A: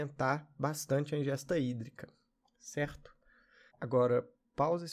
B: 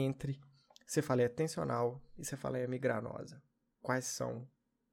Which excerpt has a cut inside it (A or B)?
A